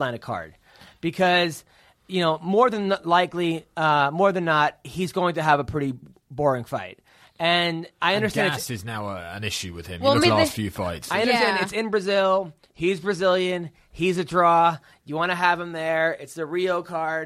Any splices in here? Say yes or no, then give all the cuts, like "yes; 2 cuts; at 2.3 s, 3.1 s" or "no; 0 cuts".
yes; 1 cut; at 10.2 s